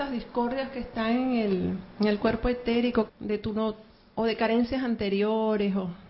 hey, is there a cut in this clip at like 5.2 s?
no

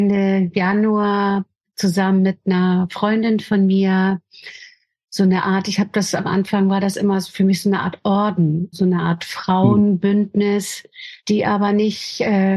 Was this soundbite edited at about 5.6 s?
no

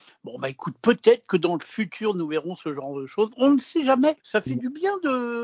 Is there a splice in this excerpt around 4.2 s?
yes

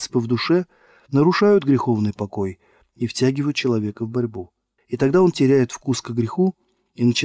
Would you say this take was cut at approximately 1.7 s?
no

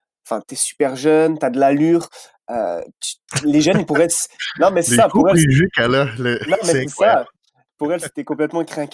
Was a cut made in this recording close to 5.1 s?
no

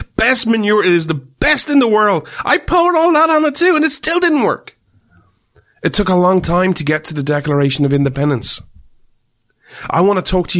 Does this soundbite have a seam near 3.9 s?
no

